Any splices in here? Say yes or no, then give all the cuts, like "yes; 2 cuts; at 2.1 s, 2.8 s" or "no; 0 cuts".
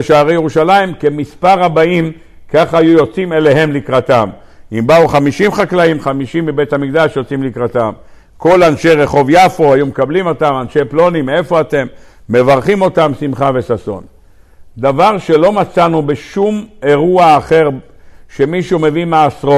no; 0 cuts